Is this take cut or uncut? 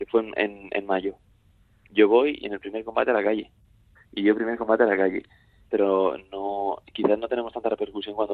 cut